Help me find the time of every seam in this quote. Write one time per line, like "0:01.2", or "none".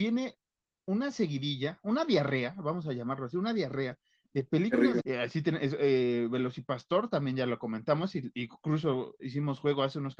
0:05.0